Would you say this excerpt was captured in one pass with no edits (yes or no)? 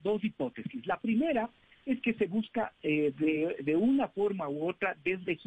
yes